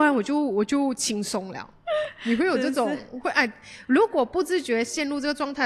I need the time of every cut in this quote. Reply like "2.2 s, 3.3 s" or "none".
none